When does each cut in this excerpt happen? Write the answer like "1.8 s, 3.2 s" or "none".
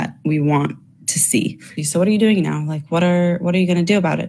1.8 s